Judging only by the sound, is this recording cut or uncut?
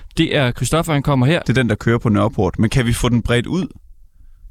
cut